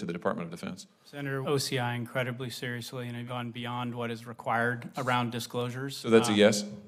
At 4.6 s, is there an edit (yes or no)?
no